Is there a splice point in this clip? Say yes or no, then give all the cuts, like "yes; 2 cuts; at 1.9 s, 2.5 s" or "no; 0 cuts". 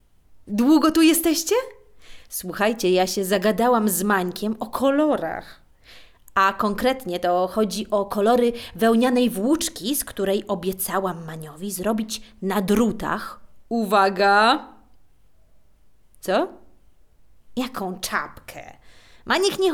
no; 0 cuts